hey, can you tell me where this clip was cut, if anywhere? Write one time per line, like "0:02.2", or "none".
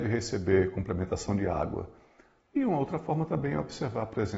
0:02.4